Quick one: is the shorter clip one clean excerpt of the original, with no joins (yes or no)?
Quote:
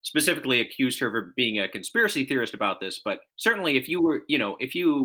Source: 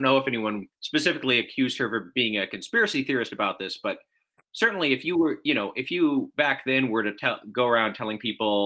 no